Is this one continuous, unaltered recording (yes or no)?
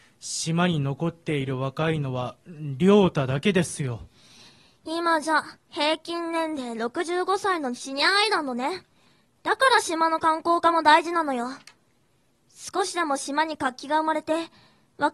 yes